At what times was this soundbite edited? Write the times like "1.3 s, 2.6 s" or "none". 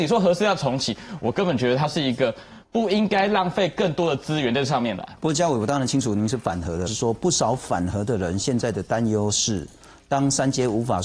6.9 s